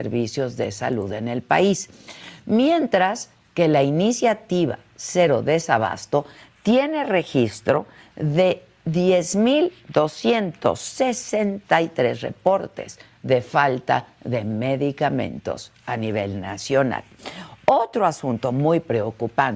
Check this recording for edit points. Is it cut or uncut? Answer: uncut